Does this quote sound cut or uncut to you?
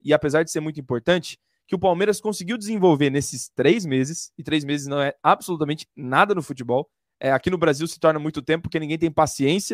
uncut